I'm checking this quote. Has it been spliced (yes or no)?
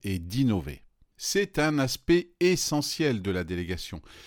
yes